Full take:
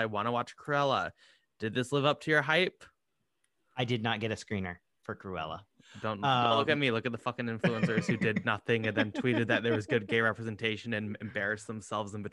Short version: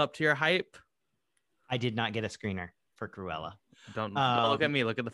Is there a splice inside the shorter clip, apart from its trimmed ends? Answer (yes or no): no